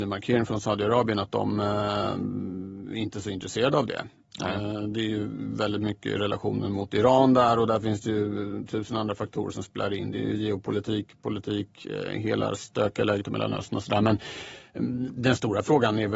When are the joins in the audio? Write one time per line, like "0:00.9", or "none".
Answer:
none